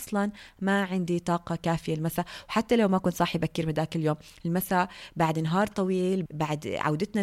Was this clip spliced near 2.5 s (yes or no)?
no